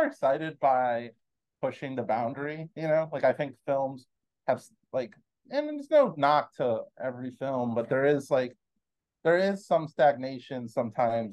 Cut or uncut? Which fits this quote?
uncut